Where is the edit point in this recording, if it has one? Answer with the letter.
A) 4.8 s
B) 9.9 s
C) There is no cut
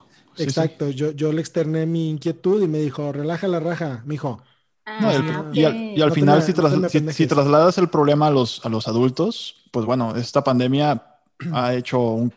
C